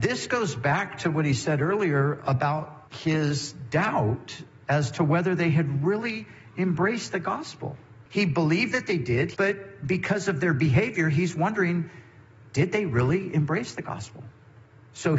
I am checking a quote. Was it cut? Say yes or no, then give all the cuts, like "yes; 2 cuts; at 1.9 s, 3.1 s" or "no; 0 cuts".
yes; 3 cuts; at 2.9 s, 8.1 s, 9.3 s